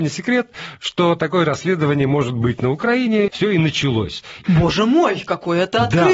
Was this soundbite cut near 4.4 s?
yes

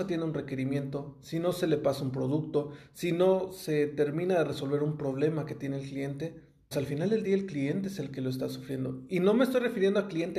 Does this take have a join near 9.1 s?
no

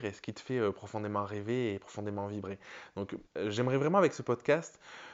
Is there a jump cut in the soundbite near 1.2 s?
no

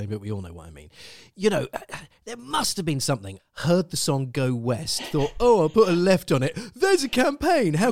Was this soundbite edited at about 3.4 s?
yes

